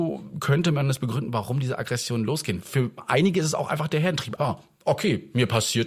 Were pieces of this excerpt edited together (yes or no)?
yes